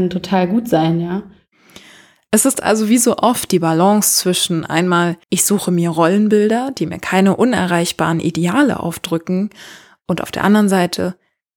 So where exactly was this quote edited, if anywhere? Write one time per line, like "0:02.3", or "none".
0:05.2